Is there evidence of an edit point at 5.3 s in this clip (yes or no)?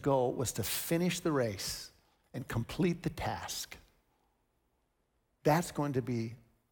yes